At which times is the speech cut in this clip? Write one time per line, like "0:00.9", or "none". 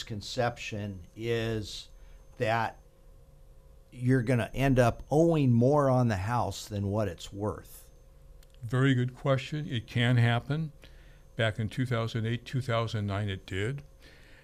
0:02.3

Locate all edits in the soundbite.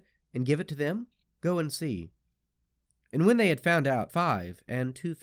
0:01.2
0:04.1

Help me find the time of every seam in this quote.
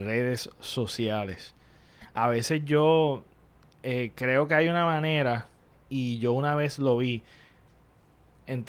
none

